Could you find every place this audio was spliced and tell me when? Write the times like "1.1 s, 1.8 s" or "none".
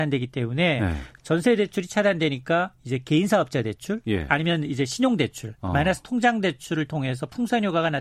1.2 s